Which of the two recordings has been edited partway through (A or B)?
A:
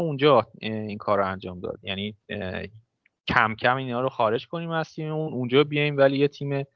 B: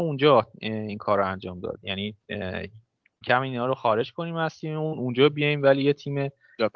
B